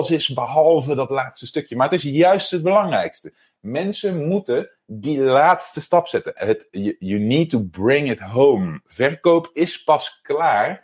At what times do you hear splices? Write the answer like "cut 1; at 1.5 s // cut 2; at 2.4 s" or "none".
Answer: cut 1; at 6.4 s

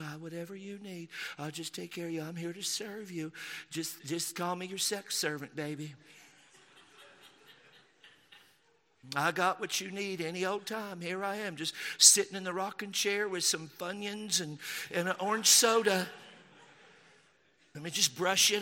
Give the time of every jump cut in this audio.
none

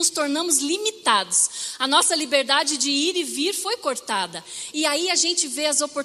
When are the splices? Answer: cut 1; at 4.7 s

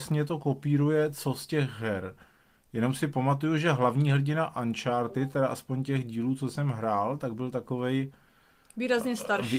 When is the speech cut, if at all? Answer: none

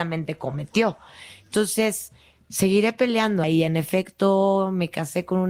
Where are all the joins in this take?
cut 1; at 3.4 s

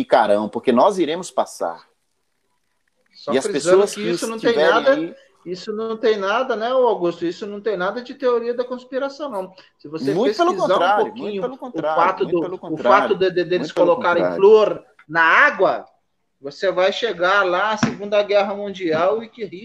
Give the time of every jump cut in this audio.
none

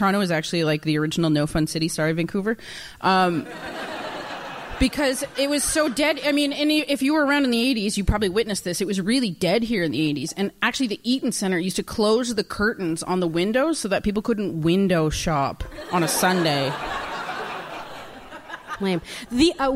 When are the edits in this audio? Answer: cut 1; at 18.8 s

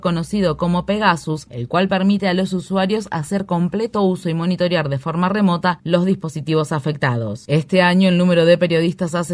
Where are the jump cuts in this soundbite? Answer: cut 1; at 7.5 s

